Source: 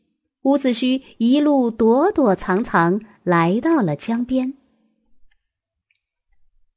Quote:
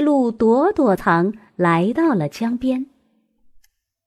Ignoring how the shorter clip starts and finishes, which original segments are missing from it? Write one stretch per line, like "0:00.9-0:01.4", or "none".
0:02.4-0:02.6